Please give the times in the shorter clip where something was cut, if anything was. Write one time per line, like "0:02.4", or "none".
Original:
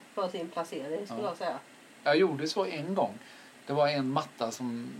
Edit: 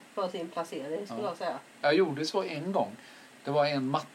0:01.7